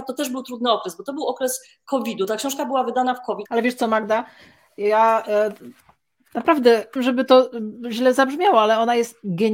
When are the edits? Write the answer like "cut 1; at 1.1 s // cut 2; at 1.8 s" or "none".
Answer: cut 1; at 3.5 s // cut 2; at 7.0 s